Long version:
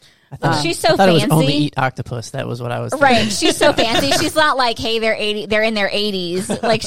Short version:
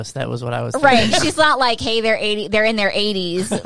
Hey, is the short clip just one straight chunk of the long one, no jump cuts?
no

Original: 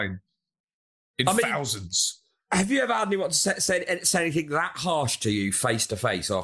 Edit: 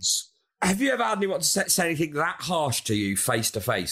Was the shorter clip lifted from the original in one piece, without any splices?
no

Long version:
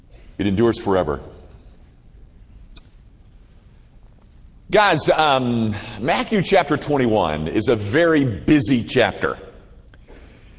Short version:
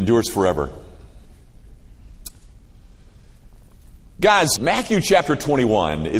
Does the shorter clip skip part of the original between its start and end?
yes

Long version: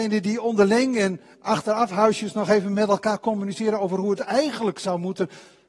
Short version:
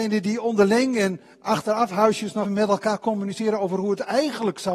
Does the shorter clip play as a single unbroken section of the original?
no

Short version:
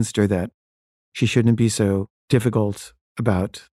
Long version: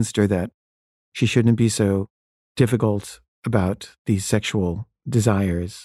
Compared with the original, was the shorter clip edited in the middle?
yes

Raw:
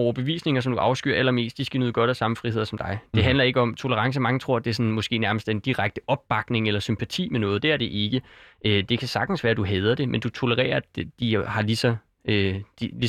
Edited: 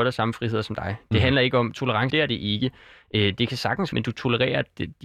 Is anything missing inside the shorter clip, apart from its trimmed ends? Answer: yes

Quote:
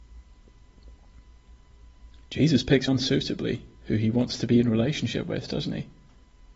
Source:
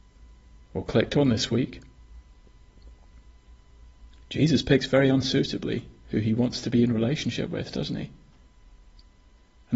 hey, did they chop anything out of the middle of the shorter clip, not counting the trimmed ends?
yes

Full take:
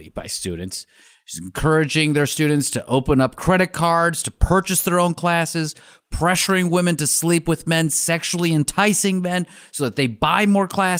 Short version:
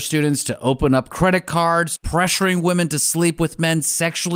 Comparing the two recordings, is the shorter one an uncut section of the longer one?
no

